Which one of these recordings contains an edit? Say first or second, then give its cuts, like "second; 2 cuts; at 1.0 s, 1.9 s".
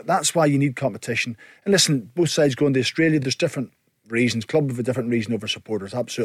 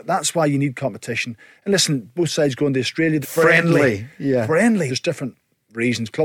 second; 2 cuts; at 3.2 s, 4.9 s